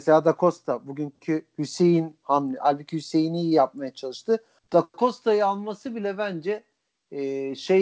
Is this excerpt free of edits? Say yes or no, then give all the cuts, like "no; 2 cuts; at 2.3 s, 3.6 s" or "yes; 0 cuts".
no; 1 cut; at 4.6 s